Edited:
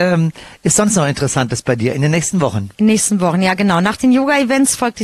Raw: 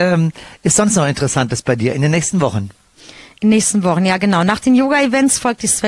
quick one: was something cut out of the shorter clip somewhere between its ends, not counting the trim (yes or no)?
yes